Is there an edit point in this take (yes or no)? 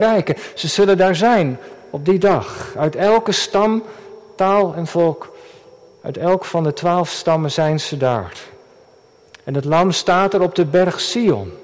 no